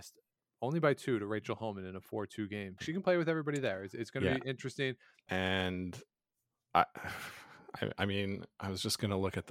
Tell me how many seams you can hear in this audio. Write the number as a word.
two